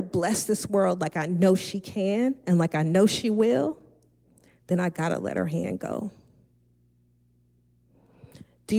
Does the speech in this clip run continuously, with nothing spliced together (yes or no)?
yes